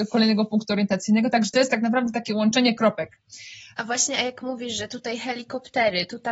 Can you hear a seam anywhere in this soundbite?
yes; 1 cut; at 3.8 s

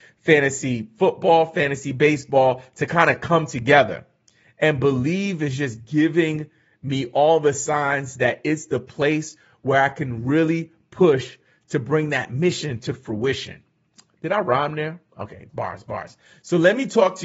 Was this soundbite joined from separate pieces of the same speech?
yes; 1 cut; at 15.5 s

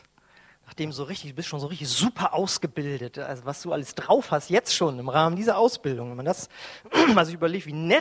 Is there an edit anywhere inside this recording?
no; 0 cuts

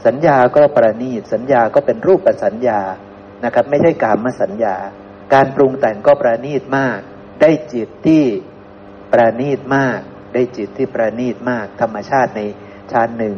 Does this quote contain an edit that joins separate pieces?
yes; 2 cuts; at 5.2 s, 7.3 s

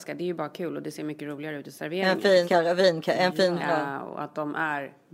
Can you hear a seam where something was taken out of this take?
yes; 2 cuts; at 2.4 s, 3.6 s

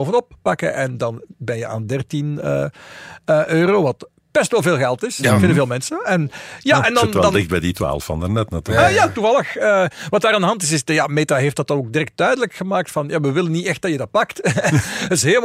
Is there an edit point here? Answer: no; 0 cuts

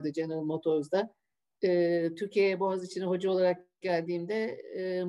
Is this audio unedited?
yes; 0 cuts

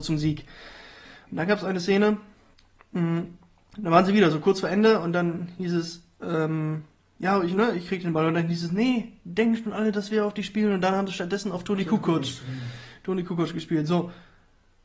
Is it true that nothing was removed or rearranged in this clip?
yes; 0 cuts

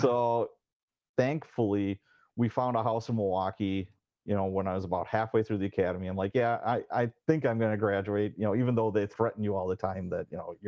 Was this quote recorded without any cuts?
yes; 0 cuts

